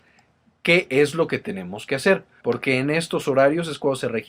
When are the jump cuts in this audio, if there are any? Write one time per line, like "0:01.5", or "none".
0:02.4